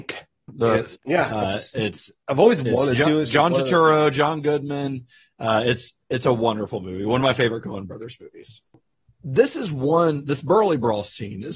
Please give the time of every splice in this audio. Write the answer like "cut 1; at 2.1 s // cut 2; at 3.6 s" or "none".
cut 1; at 0.9 s